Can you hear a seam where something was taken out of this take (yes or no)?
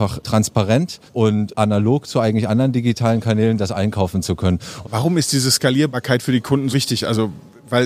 yes